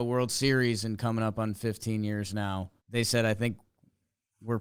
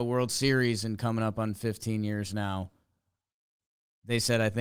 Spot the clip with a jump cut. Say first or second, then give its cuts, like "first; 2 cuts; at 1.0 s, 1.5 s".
first; 1 cut; at 2.8 s